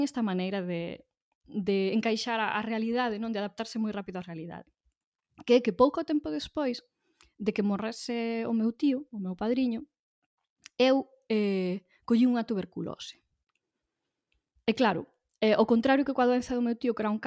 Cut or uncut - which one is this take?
uncut